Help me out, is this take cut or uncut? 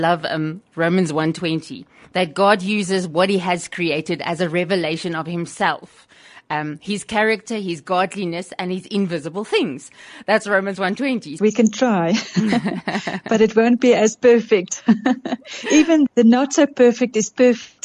cut